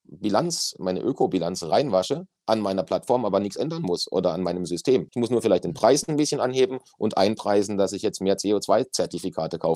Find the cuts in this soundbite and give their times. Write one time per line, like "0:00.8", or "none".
0:05.1